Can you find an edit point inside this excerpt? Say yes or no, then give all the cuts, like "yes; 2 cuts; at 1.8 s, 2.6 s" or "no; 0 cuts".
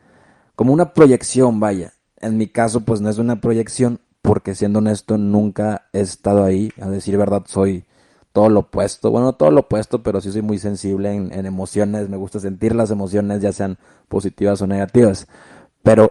no; 0 cuts